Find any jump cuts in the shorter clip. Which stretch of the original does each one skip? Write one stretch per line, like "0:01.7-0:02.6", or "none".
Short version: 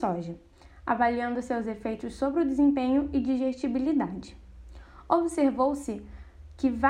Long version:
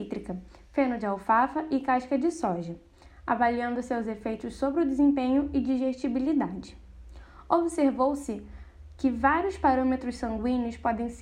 none